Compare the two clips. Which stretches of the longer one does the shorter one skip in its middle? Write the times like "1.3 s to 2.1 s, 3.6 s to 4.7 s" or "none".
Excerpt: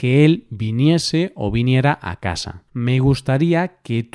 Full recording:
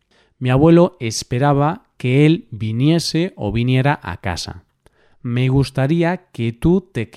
4.7 s to 5.2 s